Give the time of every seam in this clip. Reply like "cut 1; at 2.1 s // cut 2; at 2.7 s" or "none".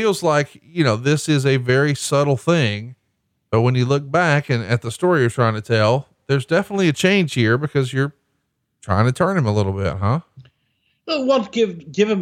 none